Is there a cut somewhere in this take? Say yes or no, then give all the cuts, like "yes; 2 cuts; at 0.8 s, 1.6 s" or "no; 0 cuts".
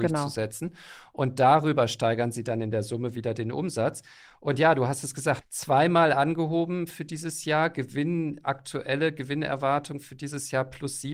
yes; 1 cut; at 5.4 s